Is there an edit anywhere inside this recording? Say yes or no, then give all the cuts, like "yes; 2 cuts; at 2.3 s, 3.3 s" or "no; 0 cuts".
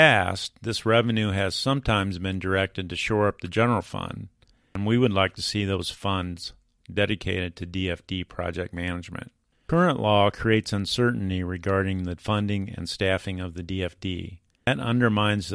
no; 0 cuts